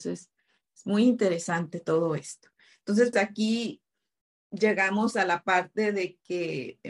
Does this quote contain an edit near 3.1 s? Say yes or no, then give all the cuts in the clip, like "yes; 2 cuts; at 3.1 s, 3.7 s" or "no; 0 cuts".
yes; 1 cut; at 3.1 s